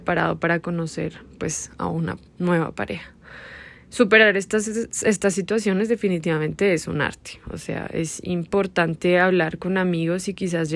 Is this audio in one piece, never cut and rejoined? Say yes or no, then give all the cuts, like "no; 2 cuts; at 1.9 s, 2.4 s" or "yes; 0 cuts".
yes; 0 cuts